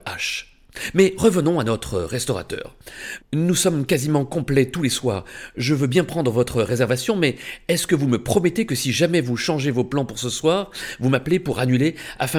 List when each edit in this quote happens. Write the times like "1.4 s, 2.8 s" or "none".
3.2 s